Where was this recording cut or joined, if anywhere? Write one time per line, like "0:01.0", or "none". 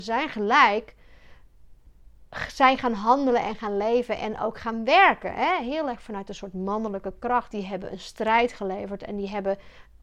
0:07.5